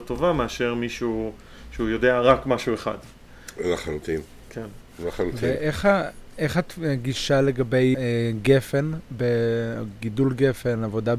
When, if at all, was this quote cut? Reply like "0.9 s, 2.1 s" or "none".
7.9 s